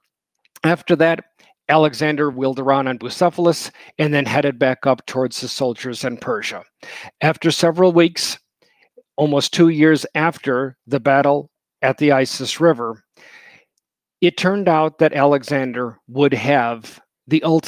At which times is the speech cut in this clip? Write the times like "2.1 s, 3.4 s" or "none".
none